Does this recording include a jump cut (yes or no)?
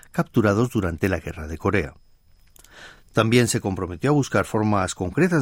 no